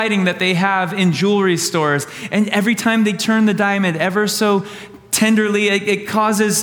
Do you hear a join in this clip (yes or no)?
no